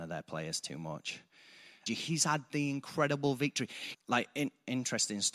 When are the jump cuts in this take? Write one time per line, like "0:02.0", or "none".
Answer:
0:01.9
0:03.9